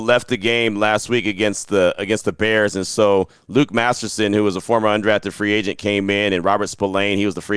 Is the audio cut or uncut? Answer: uncut